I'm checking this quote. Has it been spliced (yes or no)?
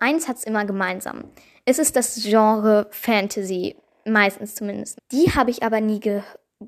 yes